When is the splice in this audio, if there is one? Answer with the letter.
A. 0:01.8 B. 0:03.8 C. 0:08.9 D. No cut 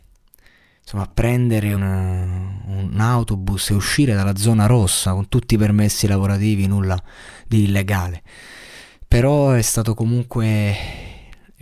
A